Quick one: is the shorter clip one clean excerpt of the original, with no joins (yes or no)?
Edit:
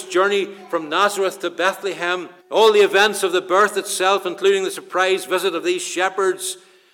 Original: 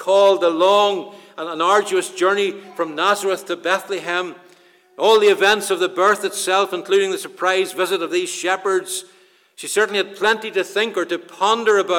no